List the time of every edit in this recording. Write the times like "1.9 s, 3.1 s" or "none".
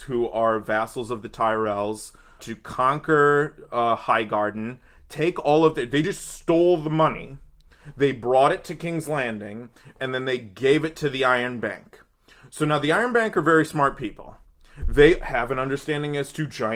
none